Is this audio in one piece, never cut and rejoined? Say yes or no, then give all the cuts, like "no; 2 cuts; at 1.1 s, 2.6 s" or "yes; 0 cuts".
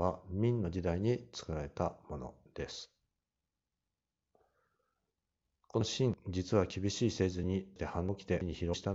yes; 0 cuts